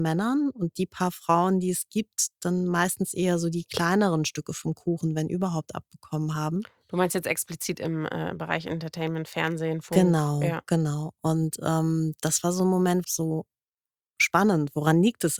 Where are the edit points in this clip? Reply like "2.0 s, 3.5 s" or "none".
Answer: 13.0 s

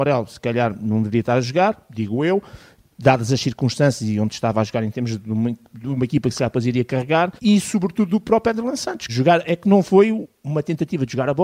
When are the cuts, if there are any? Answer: 7.4 s, 9.1 s

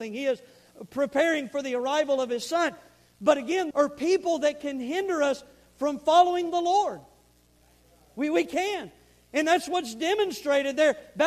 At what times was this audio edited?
3.7 s

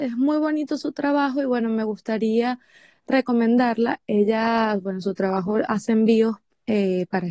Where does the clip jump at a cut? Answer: none

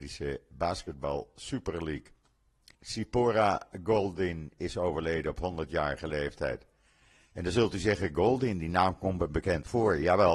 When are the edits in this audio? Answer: 2.7 s

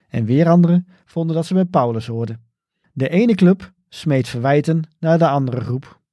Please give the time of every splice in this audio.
2.8 s

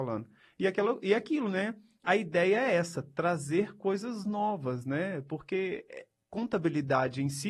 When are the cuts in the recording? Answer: 2.0 s

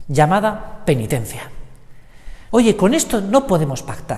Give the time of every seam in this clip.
2.5 s

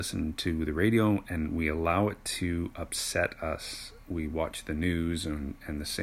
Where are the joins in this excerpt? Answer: none

